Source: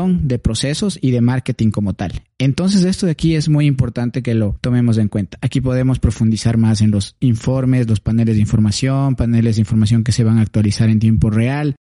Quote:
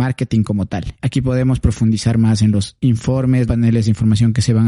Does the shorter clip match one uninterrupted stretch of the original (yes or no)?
no